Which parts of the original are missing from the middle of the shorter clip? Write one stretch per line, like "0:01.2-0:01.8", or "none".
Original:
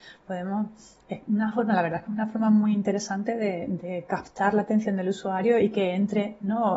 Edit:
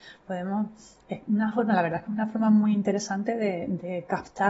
none